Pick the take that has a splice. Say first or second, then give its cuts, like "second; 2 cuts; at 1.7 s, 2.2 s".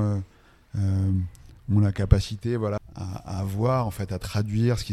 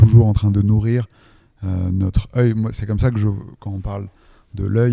first; 1 cut; at 2.8 s